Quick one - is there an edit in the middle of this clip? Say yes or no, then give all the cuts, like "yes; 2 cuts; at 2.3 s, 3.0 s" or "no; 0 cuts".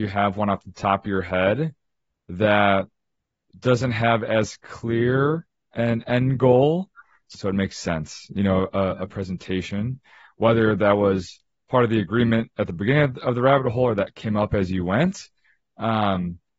yes; 1 cut; at 7.3 s